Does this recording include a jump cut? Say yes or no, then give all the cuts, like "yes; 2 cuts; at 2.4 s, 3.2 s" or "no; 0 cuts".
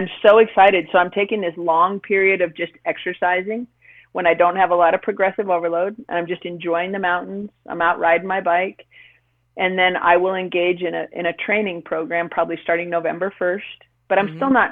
no; 0 cuts